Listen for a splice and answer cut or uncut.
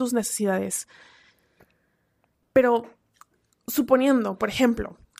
uncut